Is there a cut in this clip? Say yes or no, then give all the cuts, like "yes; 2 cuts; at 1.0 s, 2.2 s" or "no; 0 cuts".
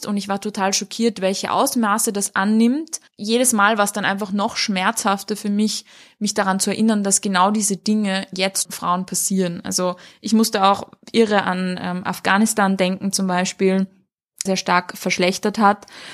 yes; 2 cuts; at 8.7 s, 14.5 s